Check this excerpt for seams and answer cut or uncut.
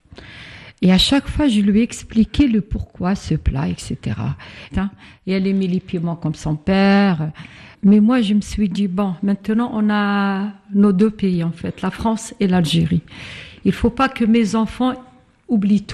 cut